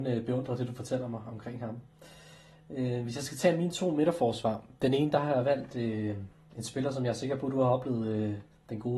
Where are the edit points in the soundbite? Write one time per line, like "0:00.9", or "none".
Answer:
none